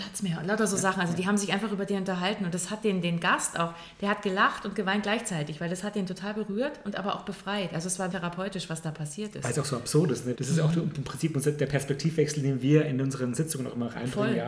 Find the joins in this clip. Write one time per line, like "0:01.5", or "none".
0:08.1
0:10.3